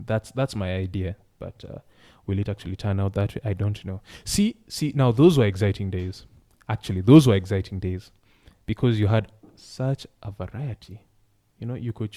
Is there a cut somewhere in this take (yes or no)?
no